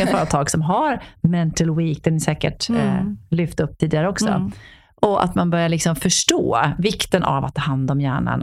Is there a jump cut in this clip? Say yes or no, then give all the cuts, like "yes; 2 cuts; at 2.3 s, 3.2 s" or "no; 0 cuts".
yes; 1 cut; at 3.8 s